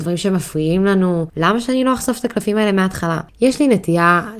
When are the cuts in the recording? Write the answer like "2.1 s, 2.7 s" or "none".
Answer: 1.3 s